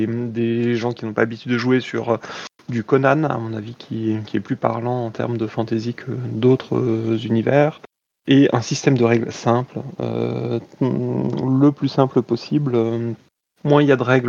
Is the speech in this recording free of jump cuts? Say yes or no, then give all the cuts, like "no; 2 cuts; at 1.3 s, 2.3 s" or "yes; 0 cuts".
yes; 0 cuts